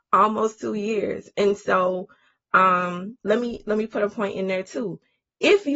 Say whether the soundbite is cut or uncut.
cut